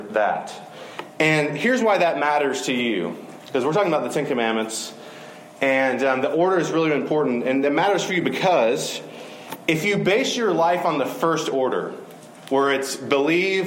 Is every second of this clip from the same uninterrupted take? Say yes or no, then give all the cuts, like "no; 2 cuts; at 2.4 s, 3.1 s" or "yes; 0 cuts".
yes; 0 cuts